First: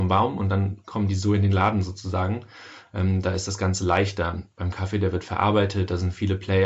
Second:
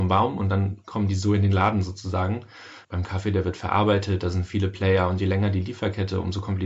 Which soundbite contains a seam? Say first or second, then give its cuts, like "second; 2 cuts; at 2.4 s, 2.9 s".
second; 1 cut; at 2.8 s